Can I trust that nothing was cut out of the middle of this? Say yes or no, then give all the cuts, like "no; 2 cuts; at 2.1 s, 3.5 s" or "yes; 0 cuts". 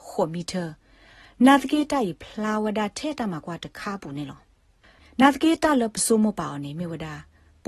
yes; 0 cuts